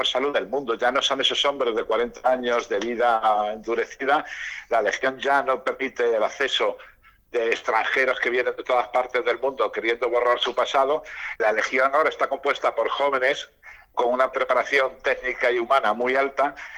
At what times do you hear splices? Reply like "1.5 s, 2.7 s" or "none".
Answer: 11.4 s